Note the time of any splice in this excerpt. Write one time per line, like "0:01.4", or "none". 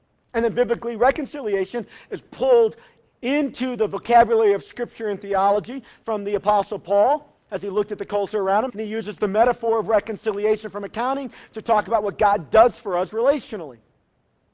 0:08.7